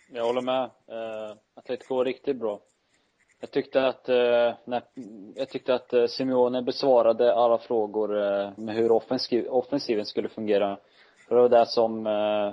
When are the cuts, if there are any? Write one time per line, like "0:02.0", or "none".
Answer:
0:08.6

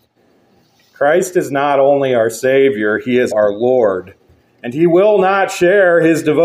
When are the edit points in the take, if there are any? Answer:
0:03.3

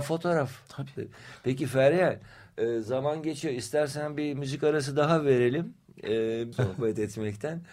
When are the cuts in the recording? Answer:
0:06.5

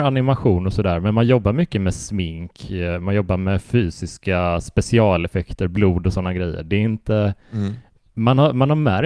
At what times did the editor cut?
none

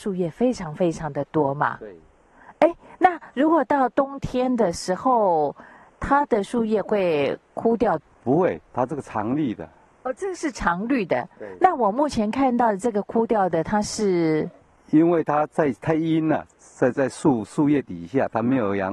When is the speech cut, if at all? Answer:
none

